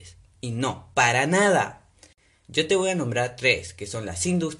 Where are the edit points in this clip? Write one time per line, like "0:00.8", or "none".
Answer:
0:00.9